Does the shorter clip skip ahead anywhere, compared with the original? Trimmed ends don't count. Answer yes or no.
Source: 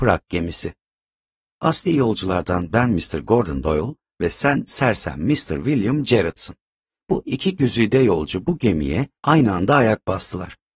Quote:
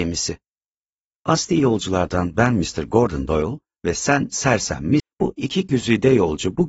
yes